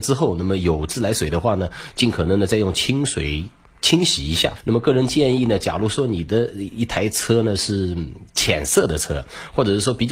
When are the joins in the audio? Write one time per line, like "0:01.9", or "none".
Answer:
none